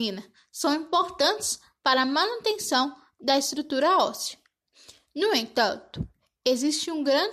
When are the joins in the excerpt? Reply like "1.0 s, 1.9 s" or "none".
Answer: none